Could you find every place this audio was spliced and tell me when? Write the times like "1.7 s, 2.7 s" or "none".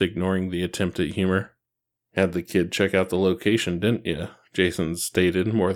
2.0 s